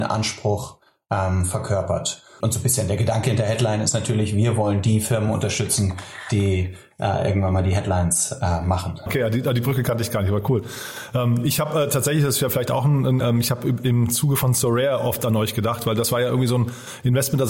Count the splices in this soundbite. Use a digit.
3